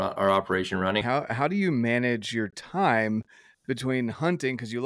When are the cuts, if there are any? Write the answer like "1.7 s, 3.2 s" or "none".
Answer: 1.0 s